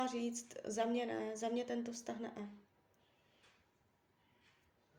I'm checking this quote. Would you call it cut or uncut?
uncut